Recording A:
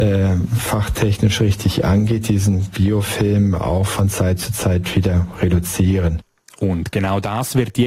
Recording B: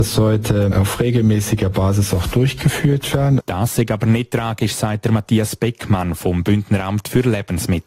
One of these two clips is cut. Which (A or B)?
B